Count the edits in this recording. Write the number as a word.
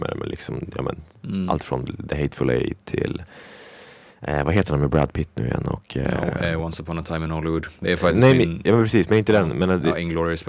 zero